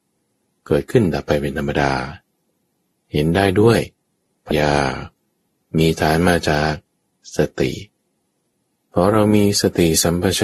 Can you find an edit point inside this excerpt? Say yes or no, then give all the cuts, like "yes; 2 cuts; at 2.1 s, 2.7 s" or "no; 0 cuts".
yes; 1 cut; at 4.5 s